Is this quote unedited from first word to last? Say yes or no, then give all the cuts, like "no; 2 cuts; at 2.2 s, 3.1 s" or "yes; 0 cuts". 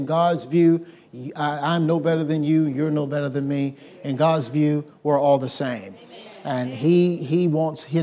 yes; 0 cuts